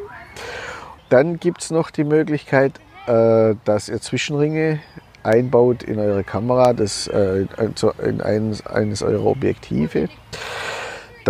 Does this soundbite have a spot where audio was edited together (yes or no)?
yes